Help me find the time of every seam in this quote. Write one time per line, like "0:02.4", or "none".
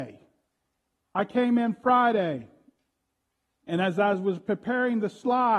0:01.0